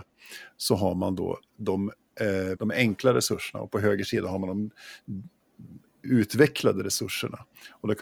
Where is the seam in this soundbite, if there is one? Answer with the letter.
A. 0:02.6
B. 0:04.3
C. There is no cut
A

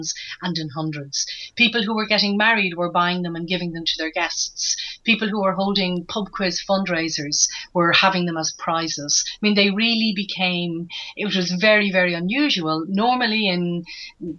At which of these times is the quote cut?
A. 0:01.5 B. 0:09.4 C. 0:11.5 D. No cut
D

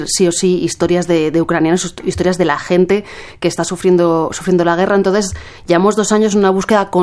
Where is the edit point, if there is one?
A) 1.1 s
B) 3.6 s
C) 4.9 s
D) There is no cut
D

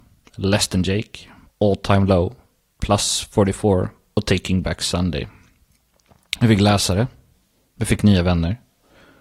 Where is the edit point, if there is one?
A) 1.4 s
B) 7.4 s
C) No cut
A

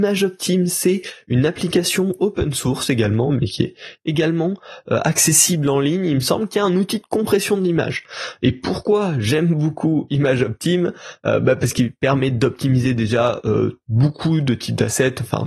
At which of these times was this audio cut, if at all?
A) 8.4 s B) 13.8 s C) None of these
B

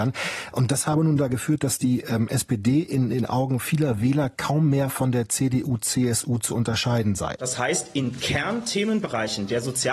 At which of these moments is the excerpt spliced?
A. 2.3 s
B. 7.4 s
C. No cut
B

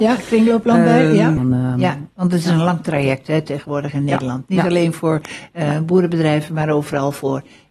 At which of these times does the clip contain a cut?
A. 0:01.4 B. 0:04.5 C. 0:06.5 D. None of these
A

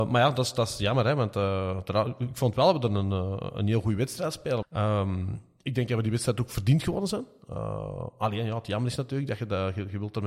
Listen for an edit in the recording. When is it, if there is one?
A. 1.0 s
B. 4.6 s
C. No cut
B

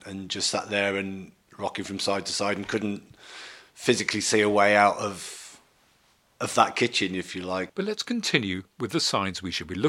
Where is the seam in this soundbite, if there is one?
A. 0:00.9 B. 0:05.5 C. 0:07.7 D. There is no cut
C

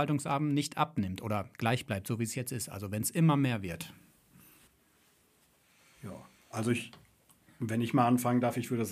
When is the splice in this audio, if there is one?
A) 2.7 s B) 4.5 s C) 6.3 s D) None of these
D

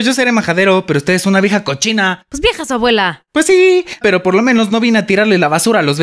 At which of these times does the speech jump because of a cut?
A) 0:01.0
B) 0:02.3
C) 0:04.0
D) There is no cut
C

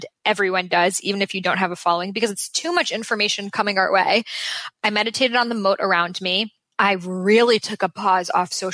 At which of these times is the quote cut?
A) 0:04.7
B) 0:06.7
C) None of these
C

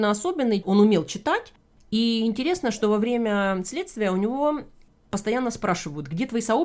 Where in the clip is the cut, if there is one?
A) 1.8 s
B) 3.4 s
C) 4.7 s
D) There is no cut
D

